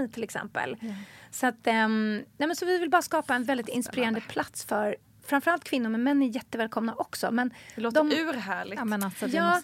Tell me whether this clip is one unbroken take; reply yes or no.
yes